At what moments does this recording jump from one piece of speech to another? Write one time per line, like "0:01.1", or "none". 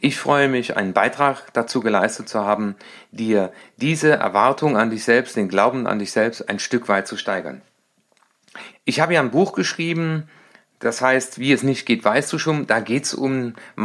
0:08.7